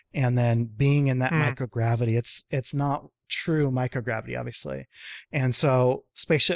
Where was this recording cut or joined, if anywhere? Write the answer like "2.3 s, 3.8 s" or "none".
none